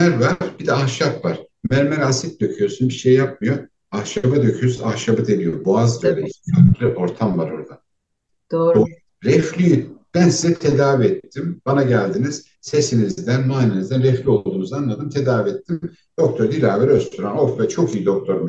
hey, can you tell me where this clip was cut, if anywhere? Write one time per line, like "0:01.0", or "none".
none